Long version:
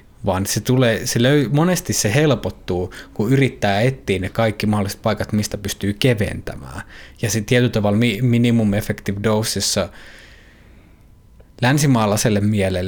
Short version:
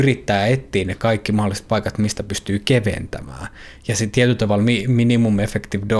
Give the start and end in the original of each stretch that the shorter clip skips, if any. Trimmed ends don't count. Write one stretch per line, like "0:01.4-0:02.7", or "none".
none